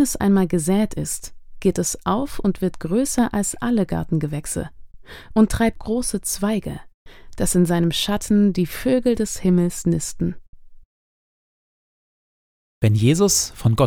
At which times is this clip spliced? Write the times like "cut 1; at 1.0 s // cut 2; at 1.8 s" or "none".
cut 1; at 5.8 s